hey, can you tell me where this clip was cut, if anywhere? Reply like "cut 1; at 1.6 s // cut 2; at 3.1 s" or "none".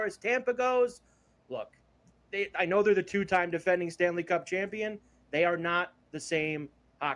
none